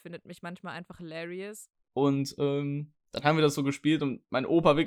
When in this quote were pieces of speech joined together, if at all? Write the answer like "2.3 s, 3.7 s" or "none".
1.8 s, 3.0 s